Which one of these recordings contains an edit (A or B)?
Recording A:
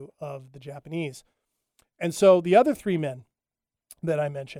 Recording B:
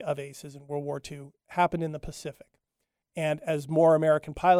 B